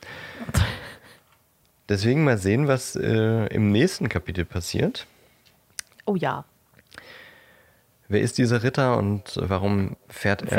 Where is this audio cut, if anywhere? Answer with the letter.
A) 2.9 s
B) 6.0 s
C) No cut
B